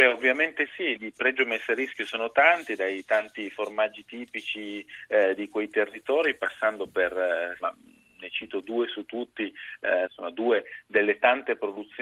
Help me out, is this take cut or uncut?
cut